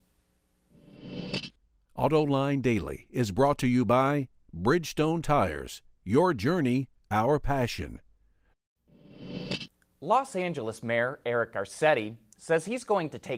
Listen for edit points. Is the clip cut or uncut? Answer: uncut